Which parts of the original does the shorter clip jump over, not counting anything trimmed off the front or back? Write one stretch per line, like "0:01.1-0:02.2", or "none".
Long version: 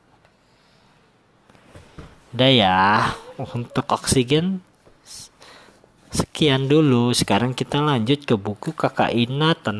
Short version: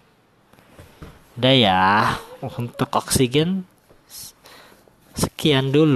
none